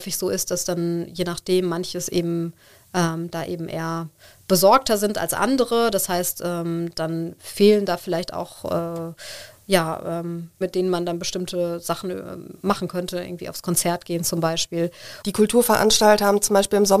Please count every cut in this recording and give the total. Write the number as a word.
two